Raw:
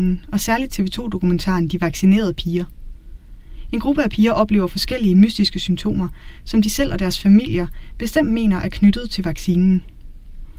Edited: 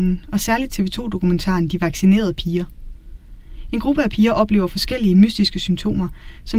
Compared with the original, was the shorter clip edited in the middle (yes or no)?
no